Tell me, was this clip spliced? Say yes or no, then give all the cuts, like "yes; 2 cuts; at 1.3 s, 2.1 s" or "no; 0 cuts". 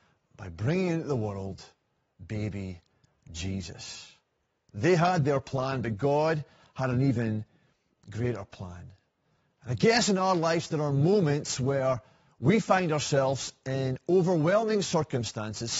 no; 0 cuts